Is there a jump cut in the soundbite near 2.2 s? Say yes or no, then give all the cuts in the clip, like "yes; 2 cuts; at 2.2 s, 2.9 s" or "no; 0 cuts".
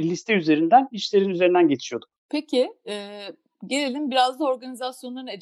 yes; 1 cut; at 2.2 s